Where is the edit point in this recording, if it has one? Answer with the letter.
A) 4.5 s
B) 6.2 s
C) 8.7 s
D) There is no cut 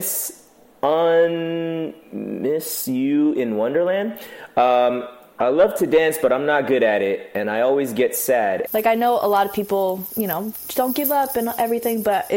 C